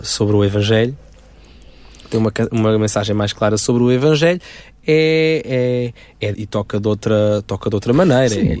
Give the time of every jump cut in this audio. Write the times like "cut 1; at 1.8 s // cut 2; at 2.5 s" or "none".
cut 1; at 6.3 s